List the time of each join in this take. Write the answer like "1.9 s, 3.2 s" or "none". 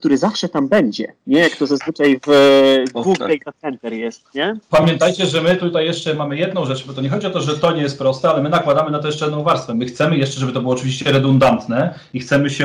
none

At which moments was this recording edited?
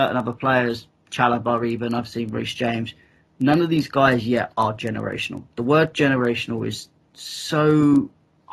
none

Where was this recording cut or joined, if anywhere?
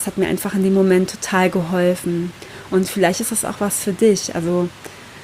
none

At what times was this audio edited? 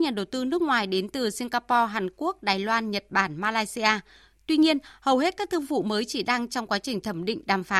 none

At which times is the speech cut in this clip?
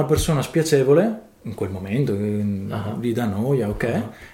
none

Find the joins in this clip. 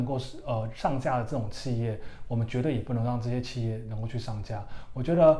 none

